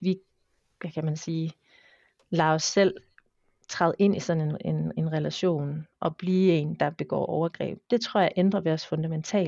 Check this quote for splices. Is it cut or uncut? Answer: uncut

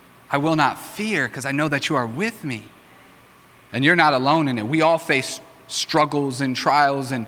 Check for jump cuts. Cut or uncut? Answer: cut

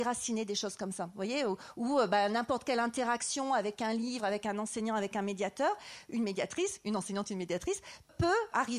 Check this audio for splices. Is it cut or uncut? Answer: uncut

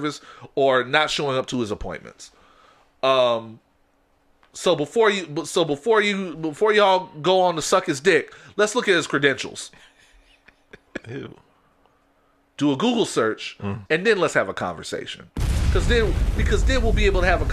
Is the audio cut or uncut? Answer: cut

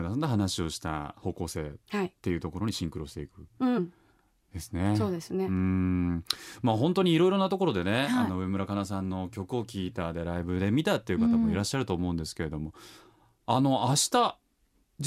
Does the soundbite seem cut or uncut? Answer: uncut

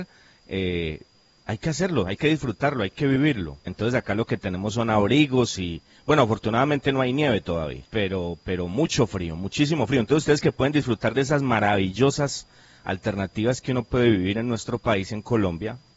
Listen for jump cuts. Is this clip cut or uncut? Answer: cut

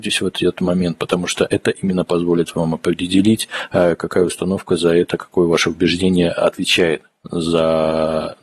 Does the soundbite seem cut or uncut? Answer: uncut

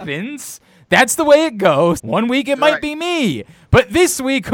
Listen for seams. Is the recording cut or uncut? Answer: cut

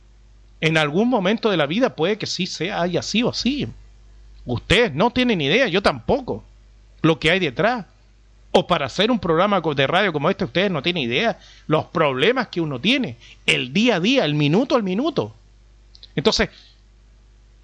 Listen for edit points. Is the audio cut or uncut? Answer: uncut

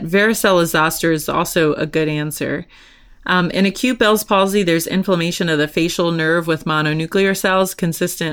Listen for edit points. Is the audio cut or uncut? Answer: uncut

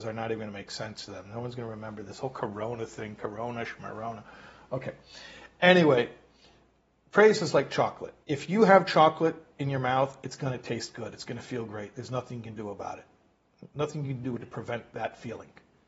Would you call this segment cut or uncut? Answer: cut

